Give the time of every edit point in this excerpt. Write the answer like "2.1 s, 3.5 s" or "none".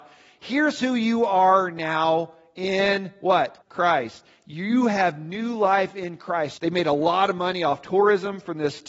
3.6 s, 6.6 s